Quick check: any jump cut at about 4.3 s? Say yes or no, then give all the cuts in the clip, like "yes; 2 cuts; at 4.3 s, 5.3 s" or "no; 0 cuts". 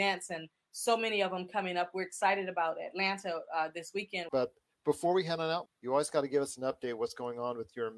yes; 2 cuts; at 4.3 s, 5.7 s